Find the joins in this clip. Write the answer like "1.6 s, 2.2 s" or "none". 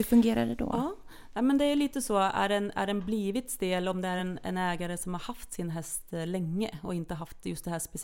none